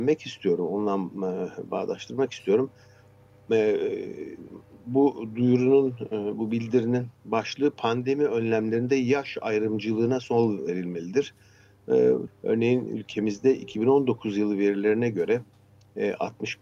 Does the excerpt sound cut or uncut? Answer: cut